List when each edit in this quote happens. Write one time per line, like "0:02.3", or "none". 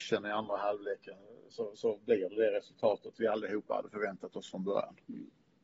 none